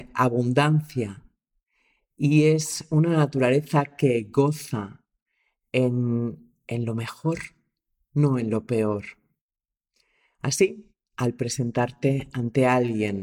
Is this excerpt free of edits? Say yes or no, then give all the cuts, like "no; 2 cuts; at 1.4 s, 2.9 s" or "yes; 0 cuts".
yes; 0 cuts